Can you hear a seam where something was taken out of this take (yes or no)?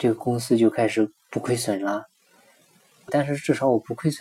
yes